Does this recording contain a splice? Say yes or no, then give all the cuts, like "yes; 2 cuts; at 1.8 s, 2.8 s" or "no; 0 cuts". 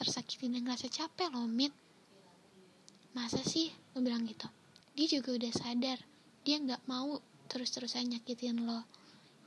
yes; 1 cut; at 4.8 s